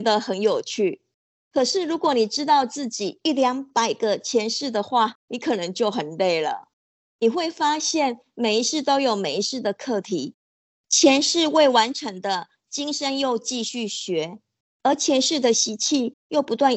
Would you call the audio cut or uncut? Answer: uncut